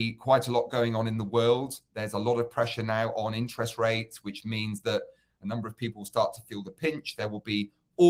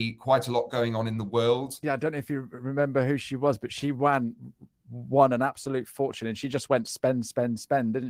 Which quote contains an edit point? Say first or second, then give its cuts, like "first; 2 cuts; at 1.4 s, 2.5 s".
second; 1 cut; at 1.8 s